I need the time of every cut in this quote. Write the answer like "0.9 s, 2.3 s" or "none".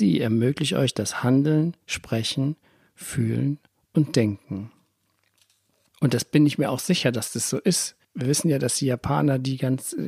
5.9 s, 8.0 s